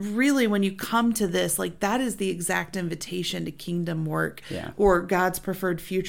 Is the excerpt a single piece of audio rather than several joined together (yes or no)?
yes